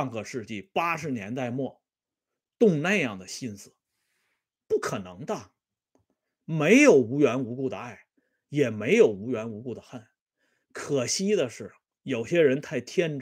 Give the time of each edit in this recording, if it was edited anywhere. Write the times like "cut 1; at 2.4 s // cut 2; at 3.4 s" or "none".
none